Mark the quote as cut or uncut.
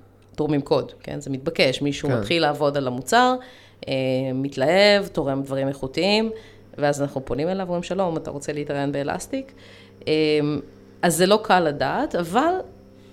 uncut